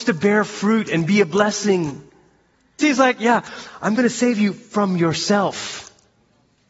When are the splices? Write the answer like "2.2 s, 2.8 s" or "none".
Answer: 2.8 s